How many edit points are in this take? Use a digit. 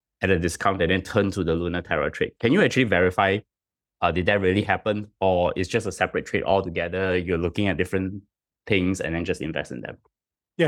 0